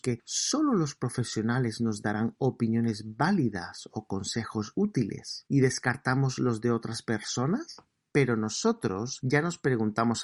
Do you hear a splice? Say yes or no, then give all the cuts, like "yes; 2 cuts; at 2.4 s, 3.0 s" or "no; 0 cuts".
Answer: yes; 1 cut; at 8.1 s